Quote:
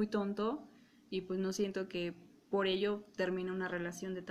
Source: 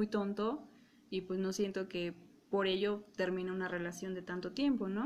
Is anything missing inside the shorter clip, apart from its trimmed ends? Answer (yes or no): no